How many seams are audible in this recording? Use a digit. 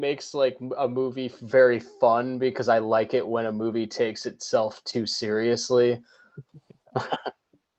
0